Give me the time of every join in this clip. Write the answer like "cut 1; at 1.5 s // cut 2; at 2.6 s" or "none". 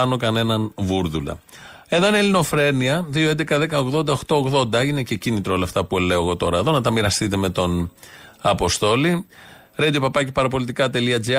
none